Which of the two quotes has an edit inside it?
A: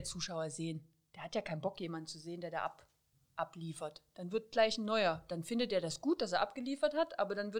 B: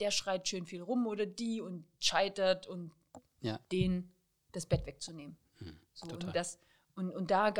B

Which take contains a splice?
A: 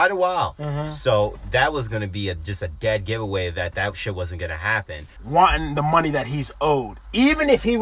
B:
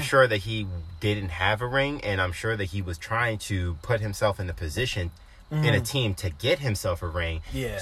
A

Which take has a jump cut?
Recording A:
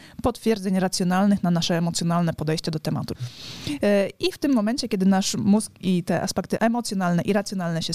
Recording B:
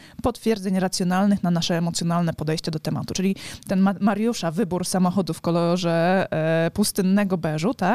A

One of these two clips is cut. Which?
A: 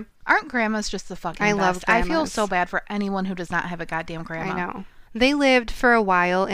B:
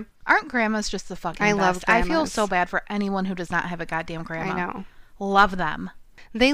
A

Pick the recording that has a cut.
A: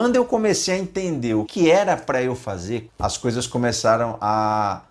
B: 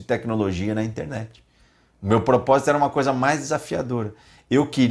A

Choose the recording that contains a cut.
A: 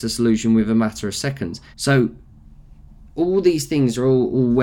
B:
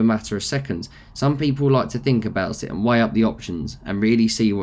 A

